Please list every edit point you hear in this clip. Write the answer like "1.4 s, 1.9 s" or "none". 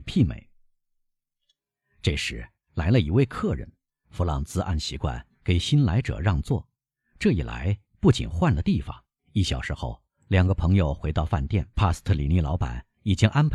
9.2 s, 11.7 s